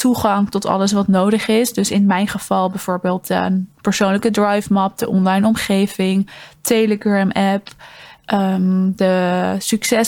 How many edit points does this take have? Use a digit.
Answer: 0